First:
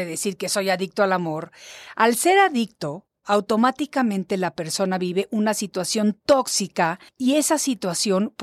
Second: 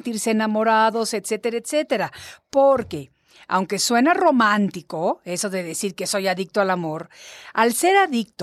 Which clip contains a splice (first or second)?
first